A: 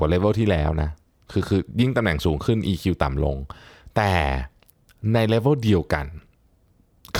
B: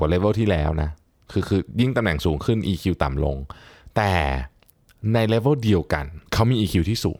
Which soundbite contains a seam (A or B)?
B